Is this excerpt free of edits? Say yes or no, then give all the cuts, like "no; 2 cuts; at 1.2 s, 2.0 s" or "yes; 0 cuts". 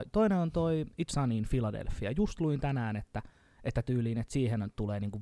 no; 1 cut; at 1.1 s